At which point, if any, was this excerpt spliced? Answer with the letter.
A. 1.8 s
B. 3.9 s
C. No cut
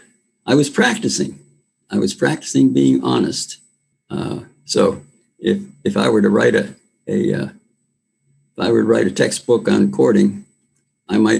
B